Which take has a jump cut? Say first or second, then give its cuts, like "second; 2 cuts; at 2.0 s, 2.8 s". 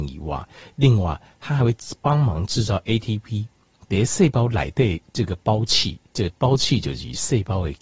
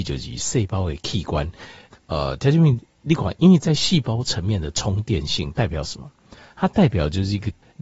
second; 1 cut; at 1.9 s